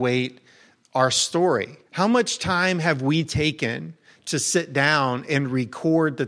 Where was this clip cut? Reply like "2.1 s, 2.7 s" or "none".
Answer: 1.9 s